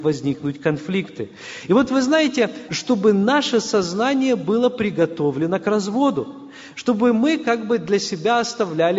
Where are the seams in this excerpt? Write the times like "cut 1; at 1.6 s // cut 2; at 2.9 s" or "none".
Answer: cut 1; at 2.7 s

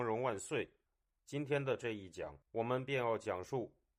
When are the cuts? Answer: cut 1; at 1.1 s // cut 2; at 2.4 s

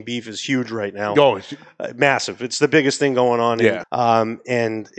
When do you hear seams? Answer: cut 1; at 3.8 s

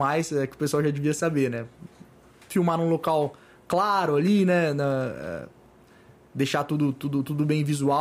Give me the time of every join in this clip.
none

